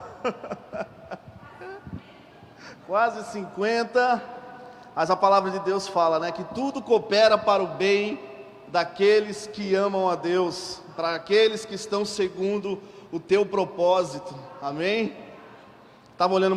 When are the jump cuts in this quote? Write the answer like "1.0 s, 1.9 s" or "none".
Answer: none